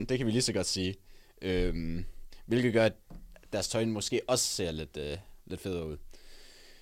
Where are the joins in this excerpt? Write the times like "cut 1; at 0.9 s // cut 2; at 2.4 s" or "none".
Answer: none